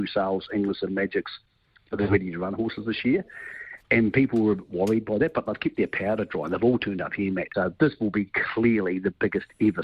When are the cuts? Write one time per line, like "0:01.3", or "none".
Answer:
0:07.5